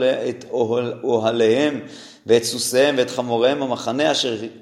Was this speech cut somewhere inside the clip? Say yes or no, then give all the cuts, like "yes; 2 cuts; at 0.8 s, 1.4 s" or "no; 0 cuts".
no; 0 cuts